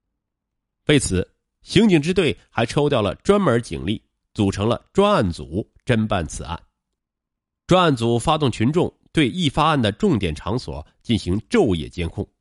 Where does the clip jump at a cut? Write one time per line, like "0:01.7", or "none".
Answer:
none